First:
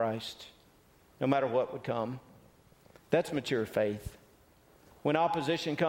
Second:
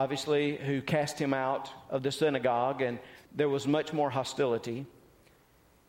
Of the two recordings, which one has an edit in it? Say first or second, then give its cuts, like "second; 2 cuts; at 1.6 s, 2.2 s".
second; 1 cut; at 3.3 s